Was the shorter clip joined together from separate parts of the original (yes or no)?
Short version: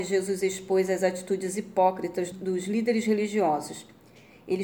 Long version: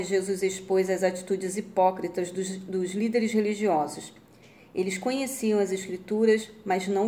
yes